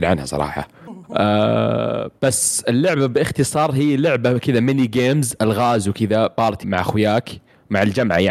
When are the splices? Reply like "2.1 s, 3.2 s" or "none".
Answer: 6.6 s